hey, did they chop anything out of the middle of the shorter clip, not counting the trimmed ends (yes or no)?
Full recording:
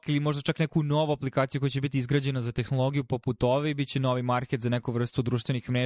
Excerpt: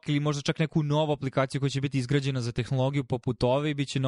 no